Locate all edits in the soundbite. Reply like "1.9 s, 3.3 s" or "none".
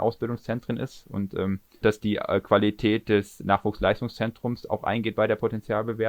1.8 s